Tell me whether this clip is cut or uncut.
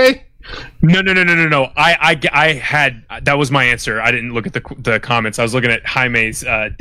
uncut